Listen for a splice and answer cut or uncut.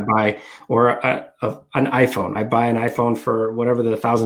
uncut